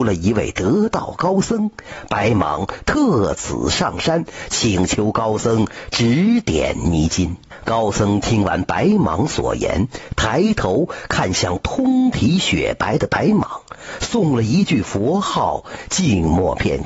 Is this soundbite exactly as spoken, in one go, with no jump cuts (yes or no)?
yes